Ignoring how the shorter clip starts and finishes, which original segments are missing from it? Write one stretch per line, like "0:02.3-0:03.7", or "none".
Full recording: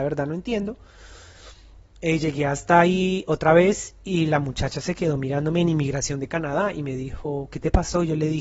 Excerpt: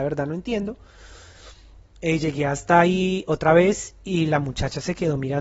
none